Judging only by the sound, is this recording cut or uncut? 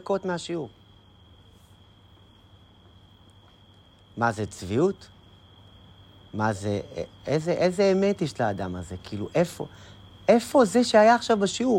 uncut